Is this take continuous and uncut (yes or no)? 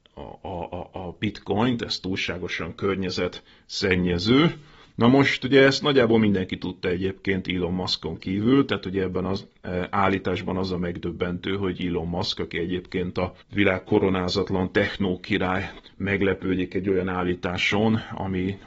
no